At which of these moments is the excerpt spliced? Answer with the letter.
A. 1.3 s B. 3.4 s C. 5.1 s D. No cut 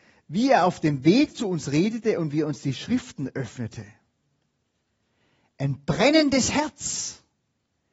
D